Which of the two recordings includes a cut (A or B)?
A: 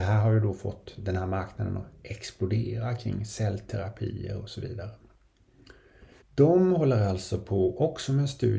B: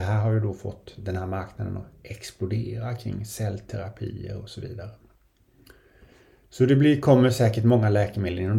A